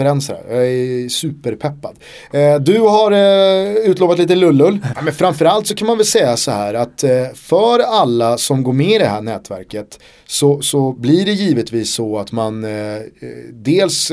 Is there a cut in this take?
yes; 1 cut; at 4.9 s

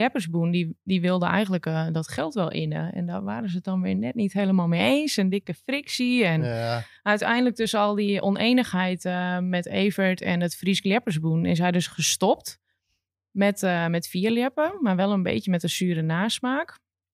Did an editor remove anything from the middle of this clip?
no; 0 cuts

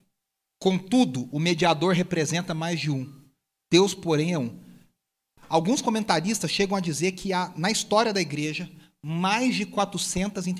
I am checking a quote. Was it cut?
no; 0 cuts

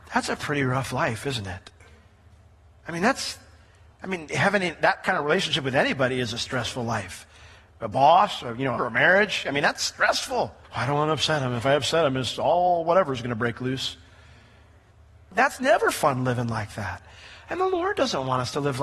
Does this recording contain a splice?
yes; 1 cut; at 8.8 s

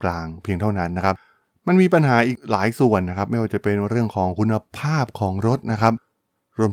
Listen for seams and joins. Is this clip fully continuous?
yes; 0 cuts

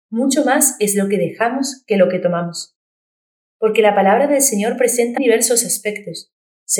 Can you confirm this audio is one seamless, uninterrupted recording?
no; 1 cut; at 5.2 s

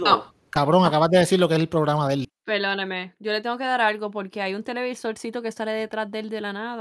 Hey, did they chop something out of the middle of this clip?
yes; 1 cut; at 2.2 s

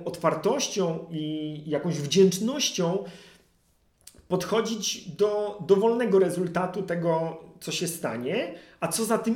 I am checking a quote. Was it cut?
no; 0 cuts

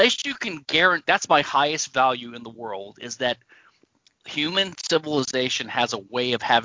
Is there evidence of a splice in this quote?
yes; 1 cut; at 1.1 s

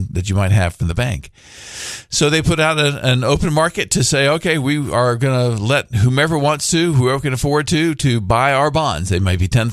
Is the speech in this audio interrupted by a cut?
no; 0 cuts

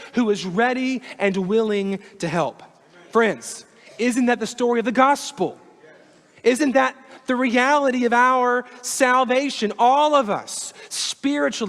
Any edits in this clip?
no; 0 cuts

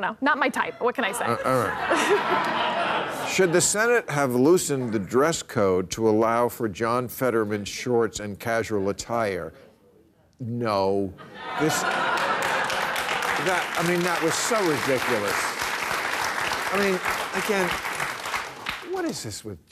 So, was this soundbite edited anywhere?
no; 0 cuts

